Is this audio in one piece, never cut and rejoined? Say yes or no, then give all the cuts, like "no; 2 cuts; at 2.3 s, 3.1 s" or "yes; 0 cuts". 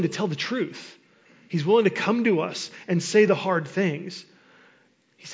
yes; 0 cuts